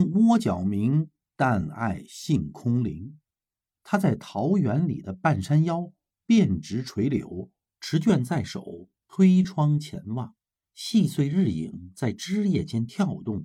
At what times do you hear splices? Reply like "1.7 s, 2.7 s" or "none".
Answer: 7.8 s